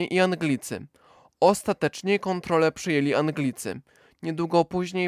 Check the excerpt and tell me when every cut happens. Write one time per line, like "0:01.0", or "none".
none